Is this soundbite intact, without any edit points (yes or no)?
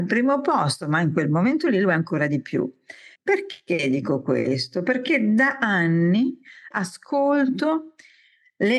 no